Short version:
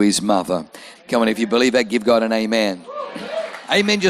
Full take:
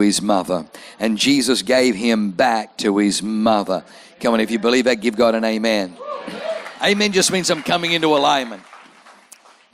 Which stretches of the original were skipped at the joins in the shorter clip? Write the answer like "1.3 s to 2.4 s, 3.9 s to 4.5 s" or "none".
1.0 s to 4.1 s